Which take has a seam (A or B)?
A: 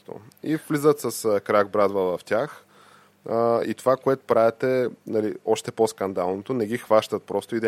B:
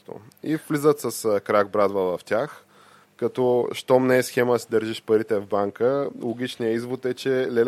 B